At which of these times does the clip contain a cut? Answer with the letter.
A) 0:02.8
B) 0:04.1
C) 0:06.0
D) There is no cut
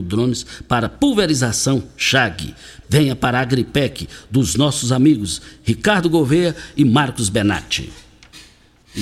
A